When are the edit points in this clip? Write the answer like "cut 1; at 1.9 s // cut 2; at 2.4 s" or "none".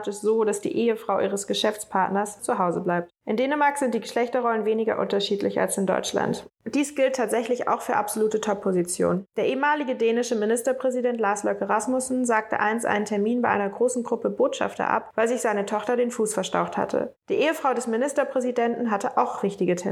cut 1; at 2.4 s